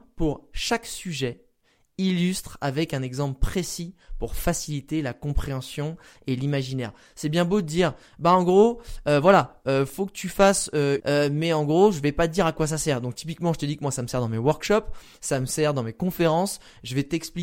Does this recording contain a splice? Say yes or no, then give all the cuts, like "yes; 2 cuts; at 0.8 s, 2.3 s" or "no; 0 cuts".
yes; 1 cut; at 11.0 s